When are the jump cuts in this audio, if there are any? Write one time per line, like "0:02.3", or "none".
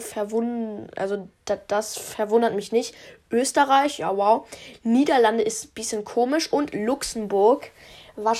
none